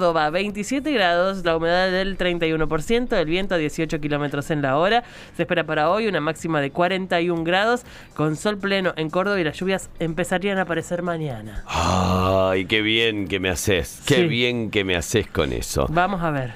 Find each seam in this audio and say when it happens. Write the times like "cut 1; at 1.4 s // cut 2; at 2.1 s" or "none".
none